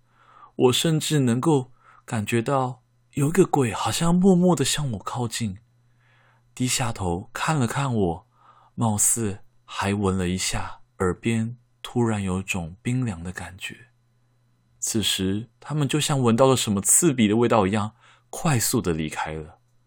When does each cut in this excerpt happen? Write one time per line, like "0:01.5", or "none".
0:10.9